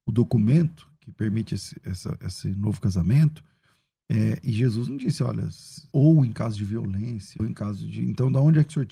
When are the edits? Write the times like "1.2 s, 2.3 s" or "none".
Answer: 5.9 s, 7.4 s